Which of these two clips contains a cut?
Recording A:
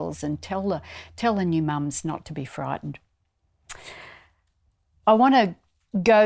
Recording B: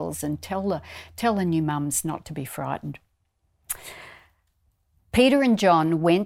B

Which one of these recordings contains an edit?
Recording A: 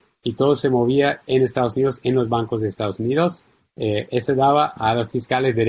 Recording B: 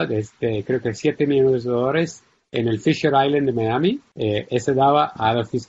B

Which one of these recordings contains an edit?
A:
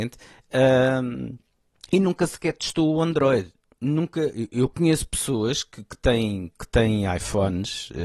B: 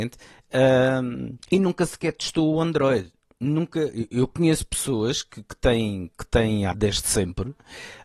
B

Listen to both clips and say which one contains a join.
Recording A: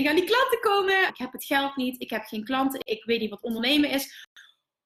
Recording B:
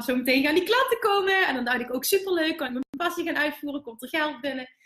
A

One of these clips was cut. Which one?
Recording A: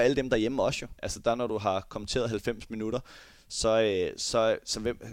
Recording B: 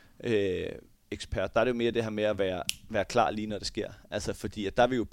A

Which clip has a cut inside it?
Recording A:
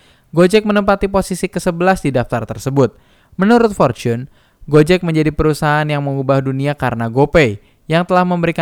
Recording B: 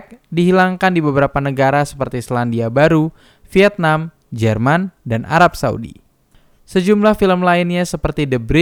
B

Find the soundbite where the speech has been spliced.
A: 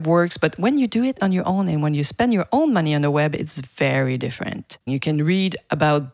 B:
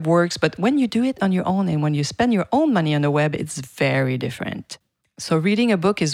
A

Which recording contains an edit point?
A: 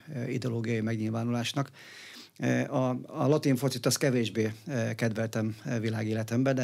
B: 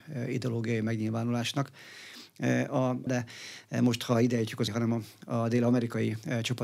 B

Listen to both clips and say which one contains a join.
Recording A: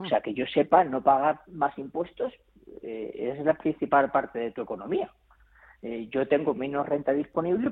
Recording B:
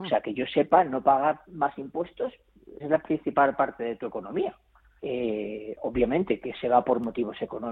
B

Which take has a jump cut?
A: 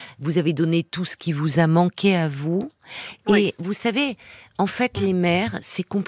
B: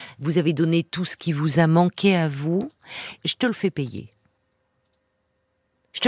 B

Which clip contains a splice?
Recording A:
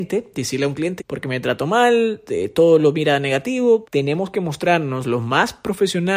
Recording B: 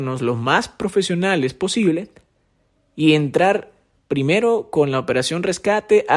A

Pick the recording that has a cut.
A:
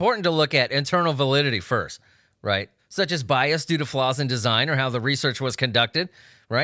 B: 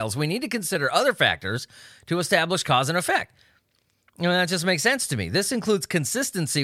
A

